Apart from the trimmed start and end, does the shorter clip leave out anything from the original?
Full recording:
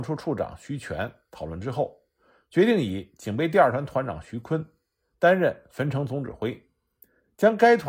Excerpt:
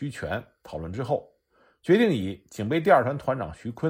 no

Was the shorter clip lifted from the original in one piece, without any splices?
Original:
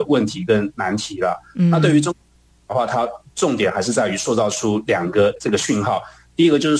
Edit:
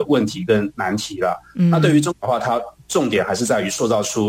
no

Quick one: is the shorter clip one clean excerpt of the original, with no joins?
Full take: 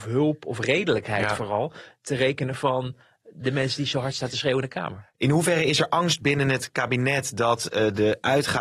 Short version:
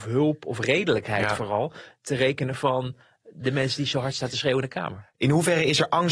yes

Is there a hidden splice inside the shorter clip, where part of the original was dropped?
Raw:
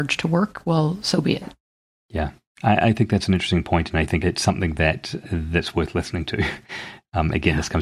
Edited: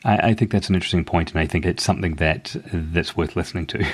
no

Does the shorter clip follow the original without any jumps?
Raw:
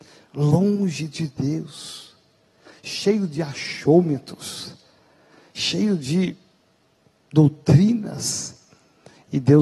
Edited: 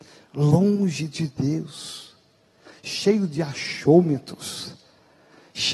yes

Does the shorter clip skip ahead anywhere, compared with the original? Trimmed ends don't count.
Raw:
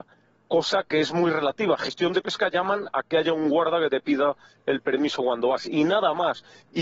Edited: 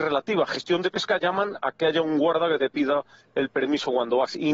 no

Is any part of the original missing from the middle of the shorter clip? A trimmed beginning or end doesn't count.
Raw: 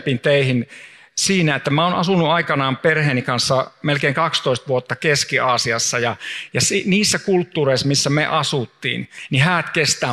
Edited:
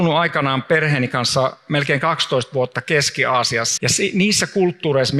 yes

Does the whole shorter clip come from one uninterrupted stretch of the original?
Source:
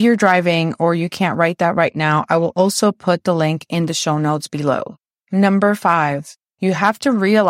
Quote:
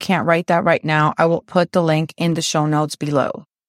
no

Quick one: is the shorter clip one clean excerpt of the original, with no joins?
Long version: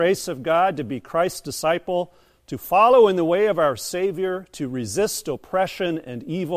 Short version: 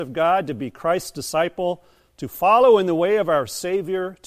yes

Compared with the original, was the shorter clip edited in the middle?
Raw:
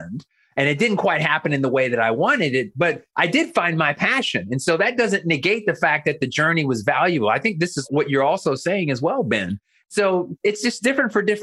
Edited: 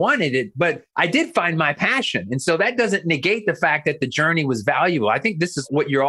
no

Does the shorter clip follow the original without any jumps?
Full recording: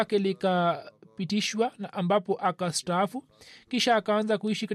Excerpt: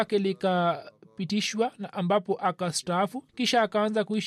no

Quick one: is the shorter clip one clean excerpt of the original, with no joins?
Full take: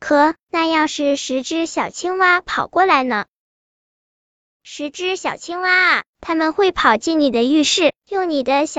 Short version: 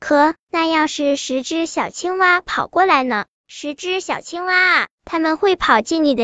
no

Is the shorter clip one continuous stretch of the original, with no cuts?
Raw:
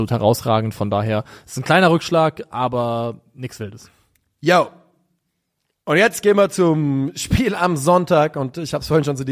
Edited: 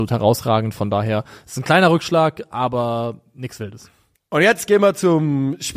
no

